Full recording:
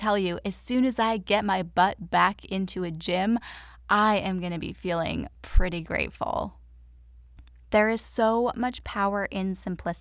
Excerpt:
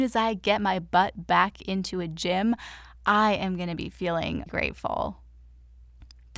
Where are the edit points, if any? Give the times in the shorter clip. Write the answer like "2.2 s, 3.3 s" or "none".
4.5 s